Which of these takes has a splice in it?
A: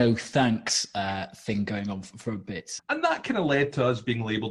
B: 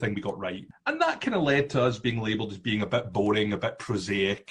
A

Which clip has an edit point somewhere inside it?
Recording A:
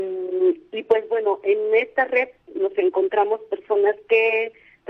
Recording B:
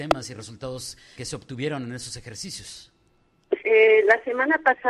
B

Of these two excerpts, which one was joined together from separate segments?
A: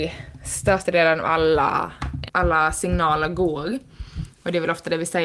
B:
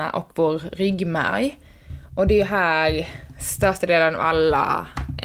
A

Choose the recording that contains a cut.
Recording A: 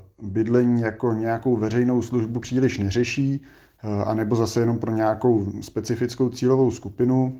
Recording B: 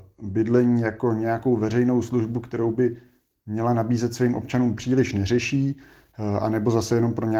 A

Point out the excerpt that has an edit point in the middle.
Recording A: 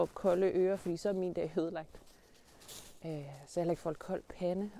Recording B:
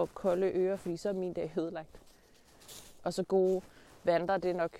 B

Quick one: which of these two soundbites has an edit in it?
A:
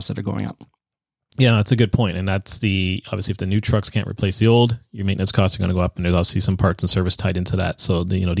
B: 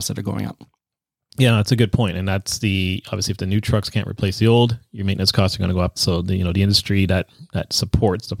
B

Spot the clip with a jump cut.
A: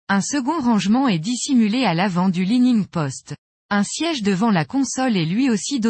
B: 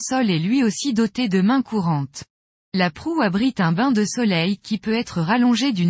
B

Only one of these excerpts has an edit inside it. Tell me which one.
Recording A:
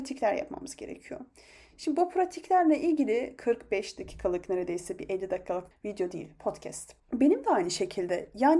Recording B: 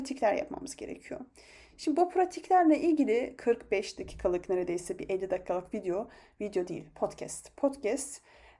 A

